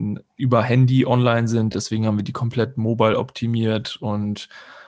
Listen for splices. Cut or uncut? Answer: uncut